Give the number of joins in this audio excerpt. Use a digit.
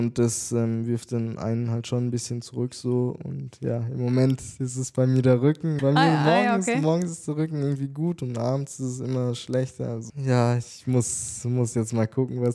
2